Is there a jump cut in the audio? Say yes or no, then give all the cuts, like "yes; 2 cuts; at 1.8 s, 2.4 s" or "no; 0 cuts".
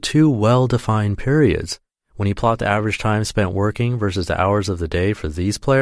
no; 0 cuts